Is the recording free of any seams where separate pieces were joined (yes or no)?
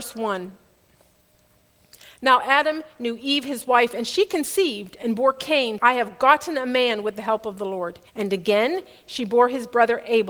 no